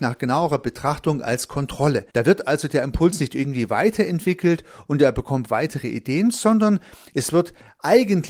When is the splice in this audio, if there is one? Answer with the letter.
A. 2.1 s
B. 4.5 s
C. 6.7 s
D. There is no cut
A